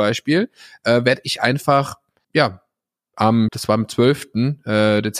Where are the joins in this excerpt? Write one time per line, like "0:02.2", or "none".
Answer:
0:02.2
0:03.5